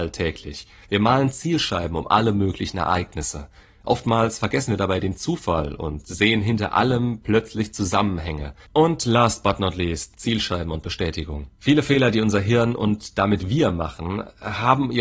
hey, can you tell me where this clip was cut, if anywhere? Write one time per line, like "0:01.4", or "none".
0:08.7
0:10.1
0:11.5